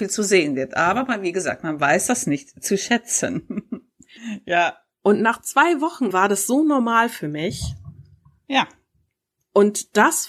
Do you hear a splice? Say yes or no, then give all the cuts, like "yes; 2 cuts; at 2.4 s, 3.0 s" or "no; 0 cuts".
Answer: yes; 2 cuts; at 4.2 s, 6.1 s